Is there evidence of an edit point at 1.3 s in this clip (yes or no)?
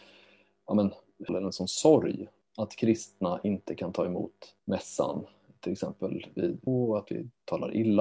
yes